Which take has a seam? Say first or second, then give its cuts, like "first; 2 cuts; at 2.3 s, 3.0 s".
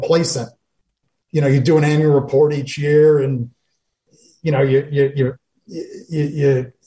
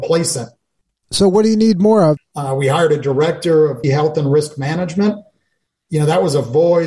second; 3 cuts; at 1.0 s, 2.2 s, 3.8 s